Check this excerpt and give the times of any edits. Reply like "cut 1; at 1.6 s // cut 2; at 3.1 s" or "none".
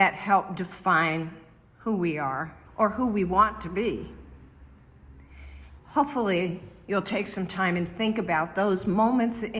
cut 1; at 2.7 s // cut 2; at 5.8 s